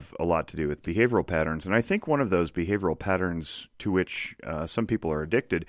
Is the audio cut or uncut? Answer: uncut